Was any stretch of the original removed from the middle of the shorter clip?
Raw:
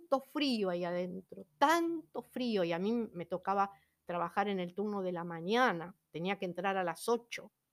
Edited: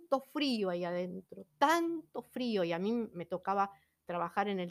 no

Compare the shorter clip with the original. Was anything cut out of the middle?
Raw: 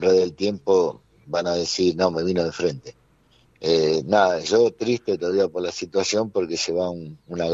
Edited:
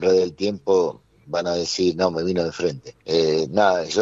yes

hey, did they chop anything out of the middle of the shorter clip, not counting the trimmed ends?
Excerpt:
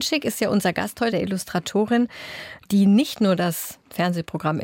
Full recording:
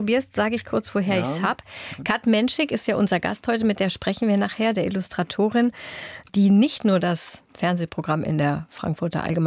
yes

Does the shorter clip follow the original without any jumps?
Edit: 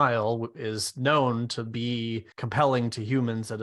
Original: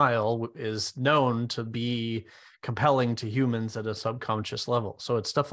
no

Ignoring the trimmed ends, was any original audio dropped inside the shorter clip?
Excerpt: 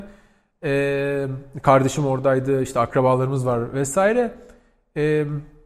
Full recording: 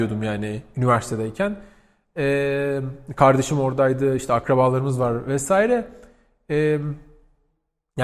no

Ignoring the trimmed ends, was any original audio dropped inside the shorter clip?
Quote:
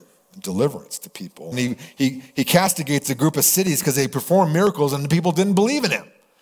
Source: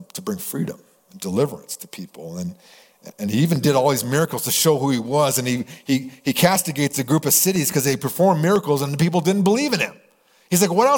yes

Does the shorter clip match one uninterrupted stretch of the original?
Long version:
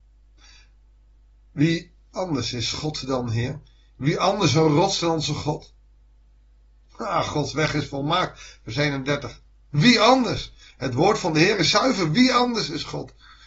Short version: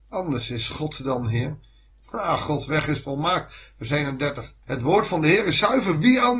no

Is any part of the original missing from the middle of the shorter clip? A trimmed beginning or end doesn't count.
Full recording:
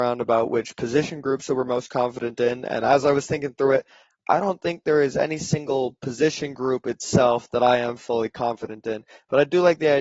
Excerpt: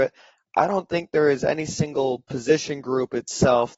no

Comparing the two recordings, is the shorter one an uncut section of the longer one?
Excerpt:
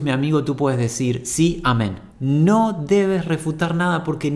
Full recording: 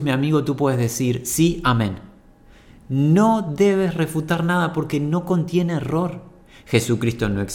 no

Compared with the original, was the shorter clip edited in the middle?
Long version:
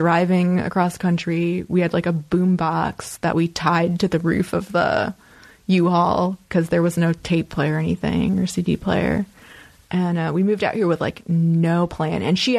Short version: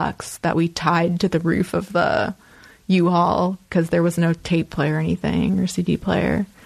no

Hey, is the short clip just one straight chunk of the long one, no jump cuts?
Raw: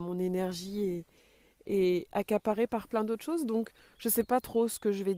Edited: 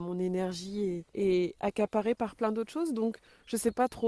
no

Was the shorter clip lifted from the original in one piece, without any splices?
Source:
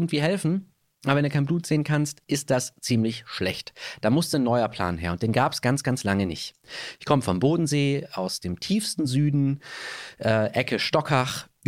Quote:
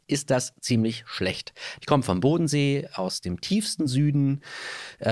no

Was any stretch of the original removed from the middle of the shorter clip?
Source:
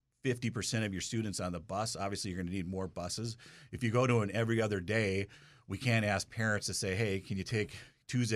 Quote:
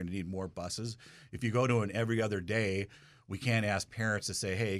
no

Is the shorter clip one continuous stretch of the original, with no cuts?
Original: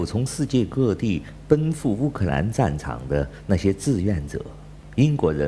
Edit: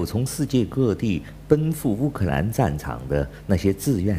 yes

